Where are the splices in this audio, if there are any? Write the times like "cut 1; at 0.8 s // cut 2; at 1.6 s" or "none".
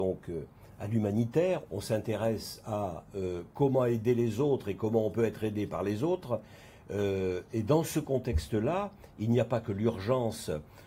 cut 1; at 1.7 s